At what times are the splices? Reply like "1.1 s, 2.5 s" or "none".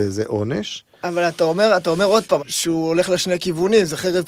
1.0 s, 2.4 s